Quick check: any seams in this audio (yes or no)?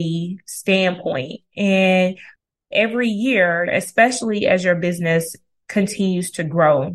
yes